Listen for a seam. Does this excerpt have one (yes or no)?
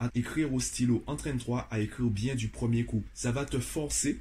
no